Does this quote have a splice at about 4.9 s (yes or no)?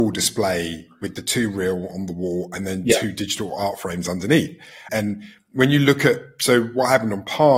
yes